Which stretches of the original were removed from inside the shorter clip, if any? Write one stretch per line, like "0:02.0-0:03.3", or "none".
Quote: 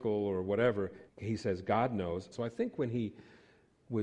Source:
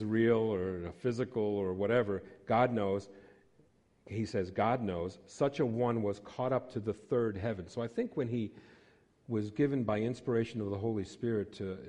0:02.4-0:04.0
0:05.2-0:07.7